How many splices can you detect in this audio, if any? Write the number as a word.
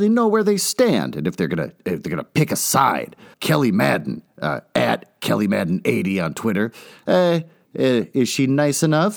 two